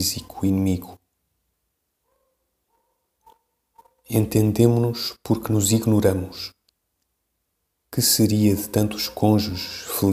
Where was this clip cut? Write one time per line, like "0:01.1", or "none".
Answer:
none